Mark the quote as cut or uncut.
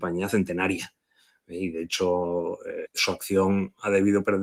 cut